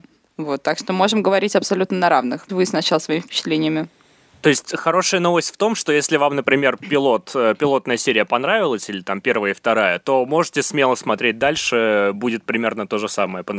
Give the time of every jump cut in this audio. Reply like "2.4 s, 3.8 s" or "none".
2.5 s